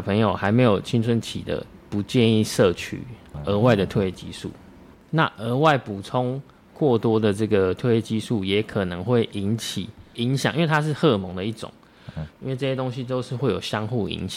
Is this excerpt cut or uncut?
cut